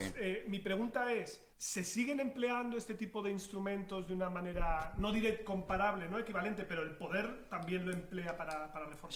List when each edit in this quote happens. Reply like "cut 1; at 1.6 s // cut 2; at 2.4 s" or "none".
cut 1; at 1.5 s